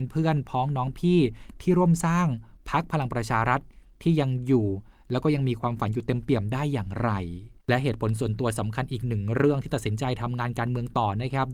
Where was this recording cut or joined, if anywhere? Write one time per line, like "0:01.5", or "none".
0:07.6